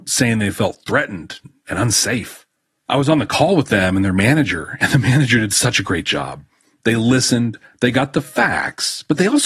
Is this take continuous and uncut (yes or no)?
yes